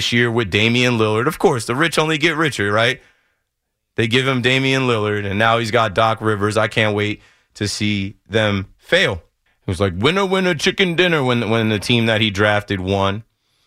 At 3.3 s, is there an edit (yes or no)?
no